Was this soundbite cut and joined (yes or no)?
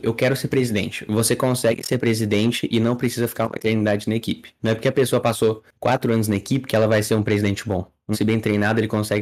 yes